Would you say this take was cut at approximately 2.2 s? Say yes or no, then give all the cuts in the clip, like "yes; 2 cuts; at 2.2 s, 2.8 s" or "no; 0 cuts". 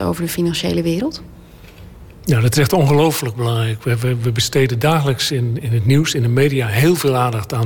no; 1 cut; at 5.6 s